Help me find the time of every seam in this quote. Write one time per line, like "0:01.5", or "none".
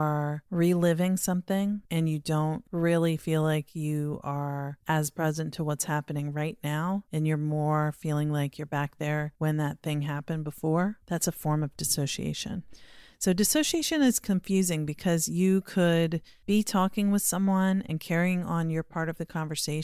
none